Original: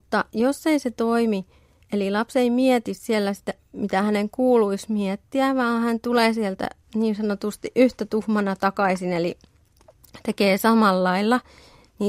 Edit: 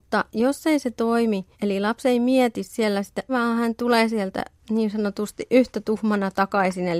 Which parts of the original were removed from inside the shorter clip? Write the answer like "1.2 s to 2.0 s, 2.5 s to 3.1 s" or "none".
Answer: 1.5 s to 1.8 s, 3.6 s to 5.5 s